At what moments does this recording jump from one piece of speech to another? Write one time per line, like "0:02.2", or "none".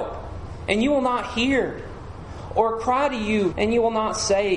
0:03.5